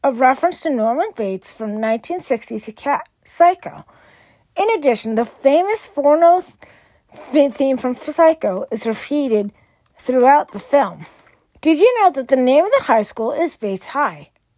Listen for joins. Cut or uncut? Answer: cut